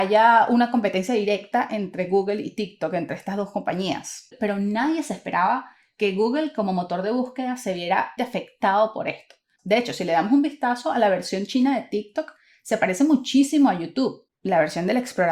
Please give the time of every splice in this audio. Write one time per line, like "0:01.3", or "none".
0:08.2
0:09.6